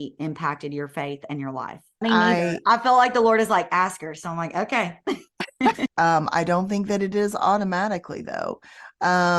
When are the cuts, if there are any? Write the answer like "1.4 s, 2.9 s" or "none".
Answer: 2.0 s, 5.9 s